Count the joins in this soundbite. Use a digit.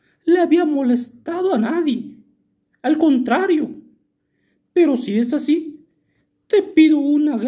0